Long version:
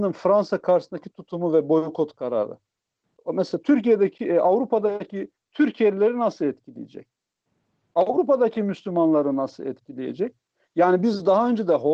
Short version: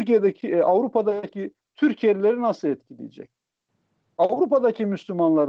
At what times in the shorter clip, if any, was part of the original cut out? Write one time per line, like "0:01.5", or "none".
none